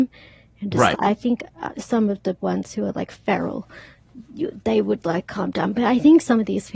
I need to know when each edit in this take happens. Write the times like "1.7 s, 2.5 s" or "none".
0.9 s

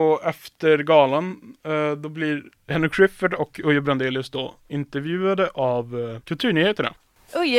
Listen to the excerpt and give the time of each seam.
none

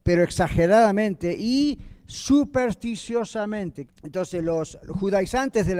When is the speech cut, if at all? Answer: 3.9 s

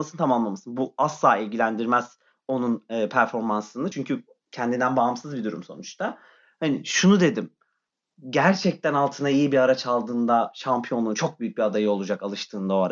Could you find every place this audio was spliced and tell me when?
none

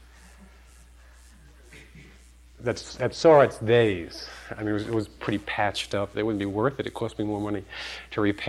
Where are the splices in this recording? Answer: 3.0 s, 6.1 s

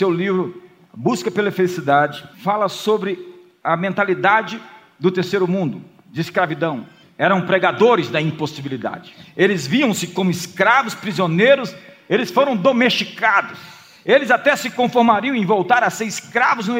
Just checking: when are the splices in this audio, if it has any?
2.3 s, 7.0 s

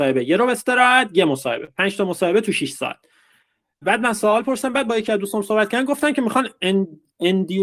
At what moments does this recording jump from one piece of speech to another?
3.8 s

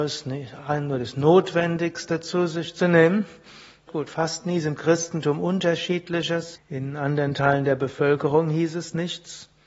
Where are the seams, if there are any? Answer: 3.9 s, 6.6 s

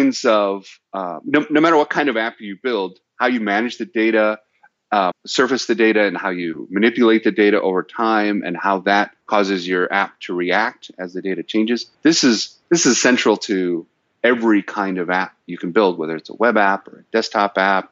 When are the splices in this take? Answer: 5.1 s, 9.2 s, 11.9 s

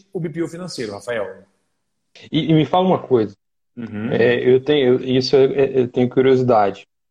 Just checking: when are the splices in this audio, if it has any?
2.2 s

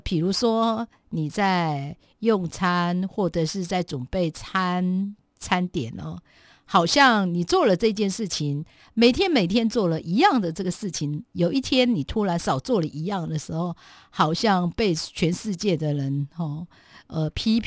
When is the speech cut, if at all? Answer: none

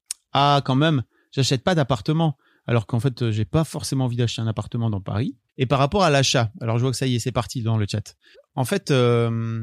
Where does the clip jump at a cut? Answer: 5.5 s, 8.3 s

